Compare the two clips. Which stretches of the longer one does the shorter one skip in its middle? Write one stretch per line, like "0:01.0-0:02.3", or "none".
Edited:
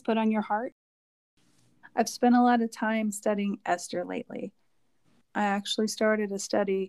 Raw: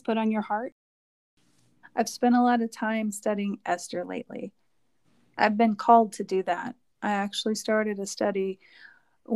0:05.2-0:06.9